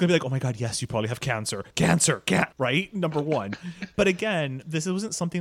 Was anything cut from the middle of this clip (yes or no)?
yes